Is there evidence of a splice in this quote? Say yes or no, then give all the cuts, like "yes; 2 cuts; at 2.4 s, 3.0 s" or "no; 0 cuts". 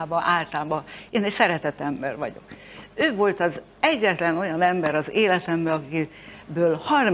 no; 0 cuts